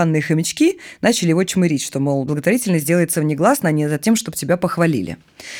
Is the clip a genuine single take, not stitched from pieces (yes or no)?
yes